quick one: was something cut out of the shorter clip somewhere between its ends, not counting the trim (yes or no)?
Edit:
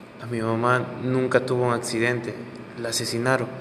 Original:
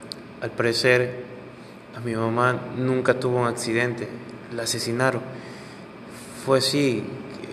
no